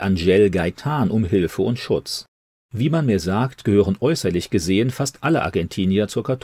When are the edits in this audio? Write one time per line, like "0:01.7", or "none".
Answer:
0:02.5